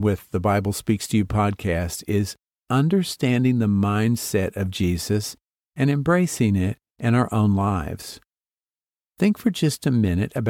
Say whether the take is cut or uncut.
uncut